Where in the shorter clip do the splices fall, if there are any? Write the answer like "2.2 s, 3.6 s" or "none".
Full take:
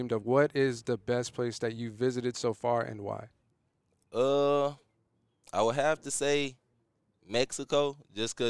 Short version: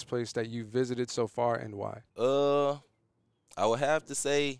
2.1 s